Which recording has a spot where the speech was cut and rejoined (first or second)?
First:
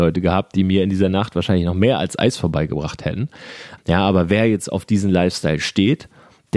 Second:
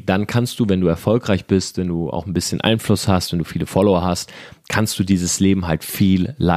first